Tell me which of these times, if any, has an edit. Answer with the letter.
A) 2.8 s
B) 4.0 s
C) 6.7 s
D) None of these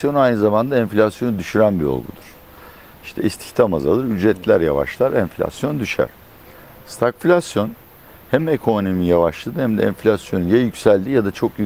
D